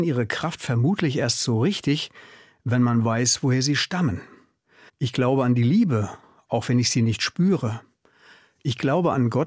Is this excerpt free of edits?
no; 1 cut; at 4.9 s

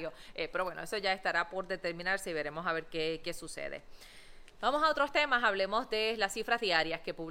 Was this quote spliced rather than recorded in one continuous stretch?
no; 0 cuts

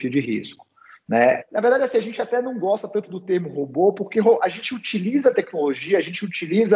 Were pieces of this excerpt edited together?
yes; 1 cut; at 1.4 s

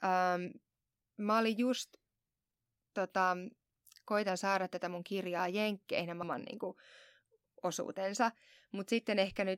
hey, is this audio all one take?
no; 1 cut; at 6.2 s

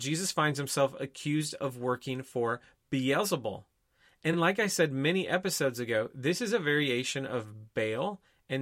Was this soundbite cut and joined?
no; 0 cuts

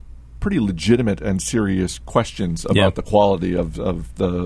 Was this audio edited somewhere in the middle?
no; 0 cuts

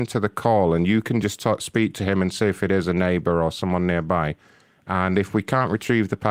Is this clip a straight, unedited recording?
yes; 0 cuts

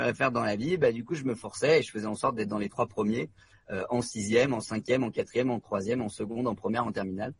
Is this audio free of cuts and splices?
yes; 0 cuts

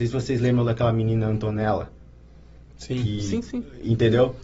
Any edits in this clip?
no; 0 cuts

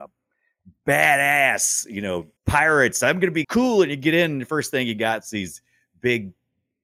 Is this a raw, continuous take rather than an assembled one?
no; 2 cuts; at 2.4 s, 3.4 s

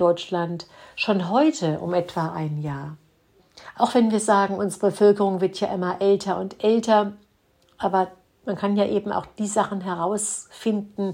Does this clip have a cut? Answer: no; 0 cuts

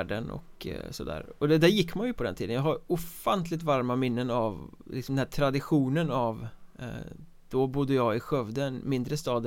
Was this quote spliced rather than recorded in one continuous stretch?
yes; 1 cut; at 2.2 s

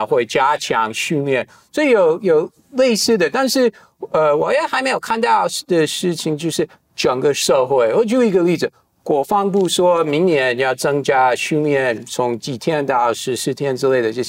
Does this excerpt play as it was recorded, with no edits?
yes; 0 cuts

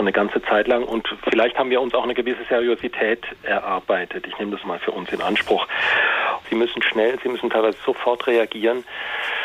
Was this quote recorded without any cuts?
no; 2 cuts; at 4.6 s, 6.4 s

